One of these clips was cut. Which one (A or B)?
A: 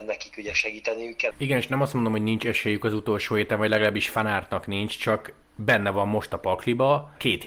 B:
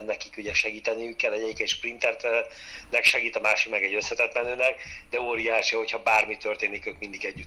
A